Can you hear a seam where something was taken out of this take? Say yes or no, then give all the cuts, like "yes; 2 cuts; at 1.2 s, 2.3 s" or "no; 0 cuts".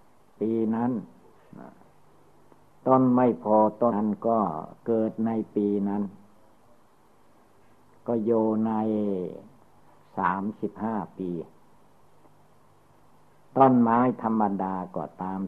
yes; 1 cut; at 3.9 s